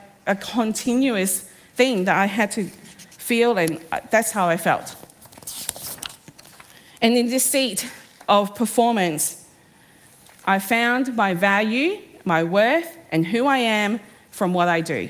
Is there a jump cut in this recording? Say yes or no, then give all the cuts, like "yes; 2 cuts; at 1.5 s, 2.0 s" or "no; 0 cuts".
no; 0 cuts